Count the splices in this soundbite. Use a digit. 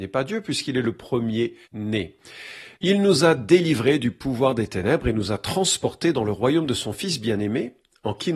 2